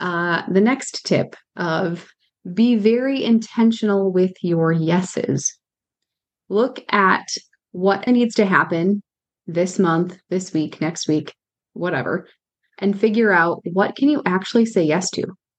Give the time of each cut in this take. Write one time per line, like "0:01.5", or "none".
0:08.1